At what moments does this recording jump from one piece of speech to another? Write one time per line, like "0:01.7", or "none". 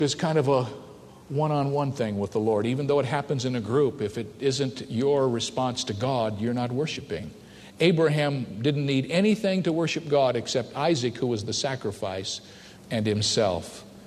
0:12.8